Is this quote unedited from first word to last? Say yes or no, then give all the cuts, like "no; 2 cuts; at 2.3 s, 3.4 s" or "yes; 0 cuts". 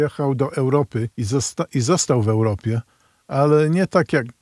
no; 1 cut; at 1.1 s